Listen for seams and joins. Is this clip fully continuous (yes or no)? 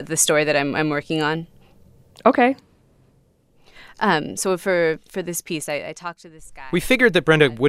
yes